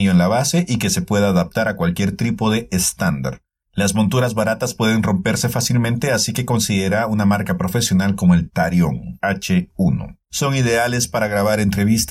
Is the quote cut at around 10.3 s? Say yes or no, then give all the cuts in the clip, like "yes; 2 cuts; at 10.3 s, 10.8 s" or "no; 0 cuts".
yes; 1 cut; at 10.3 s